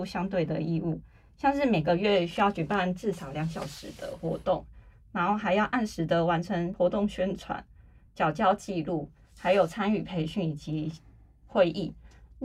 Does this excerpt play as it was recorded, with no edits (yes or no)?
yes